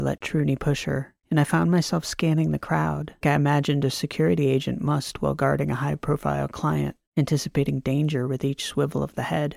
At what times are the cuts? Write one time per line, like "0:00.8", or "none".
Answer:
0:03.2